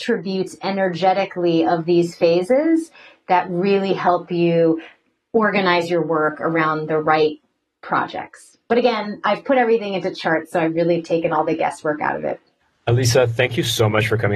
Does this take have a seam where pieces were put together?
no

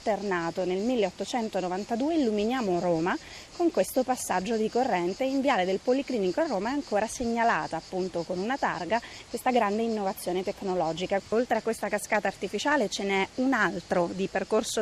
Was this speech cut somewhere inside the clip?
yes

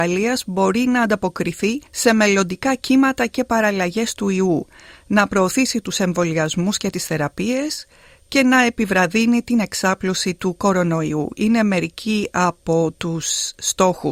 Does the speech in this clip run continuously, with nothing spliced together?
no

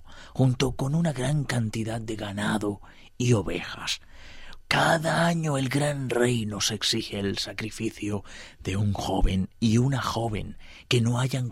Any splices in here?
yes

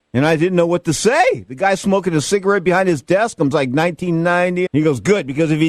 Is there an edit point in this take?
yes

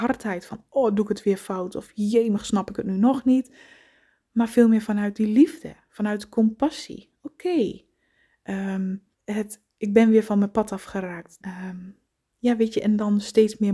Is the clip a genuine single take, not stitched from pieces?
no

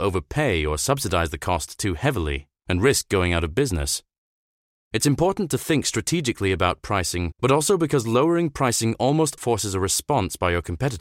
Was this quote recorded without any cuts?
no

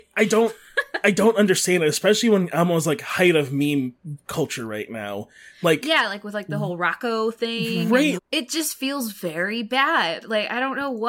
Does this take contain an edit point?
yes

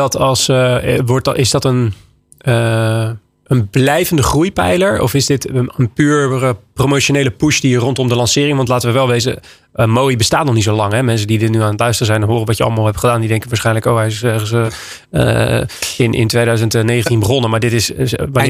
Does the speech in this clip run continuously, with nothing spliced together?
yes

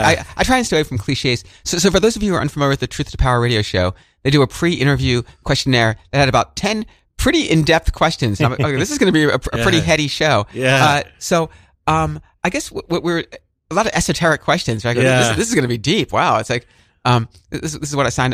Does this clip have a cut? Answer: no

